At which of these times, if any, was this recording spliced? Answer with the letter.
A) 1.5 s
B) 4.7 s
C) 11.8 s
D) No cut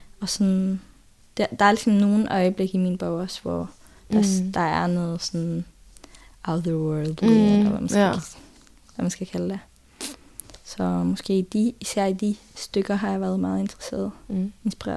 D